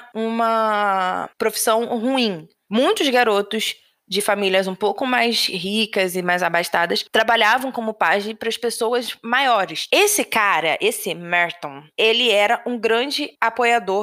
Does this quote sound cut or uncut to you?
cut